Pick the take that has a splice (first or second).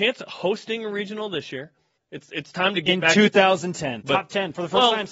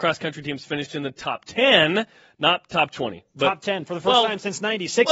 first